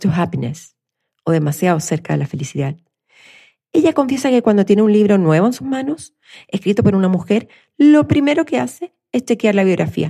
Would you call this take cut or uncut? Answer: uncut